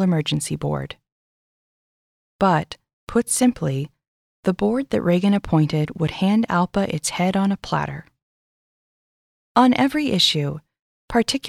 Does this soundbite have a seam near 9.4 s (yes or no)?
no